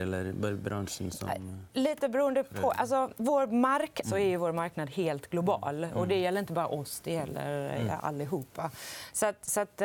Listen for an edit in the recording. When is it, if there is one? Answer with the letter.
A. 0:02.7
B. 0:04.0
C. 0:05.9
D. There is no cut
B